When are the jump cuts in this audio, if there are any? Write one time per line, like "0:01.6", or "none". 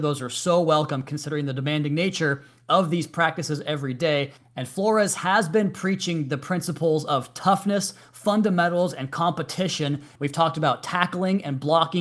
0:10.2